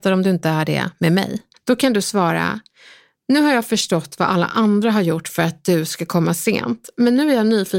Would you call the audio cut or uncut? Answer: cut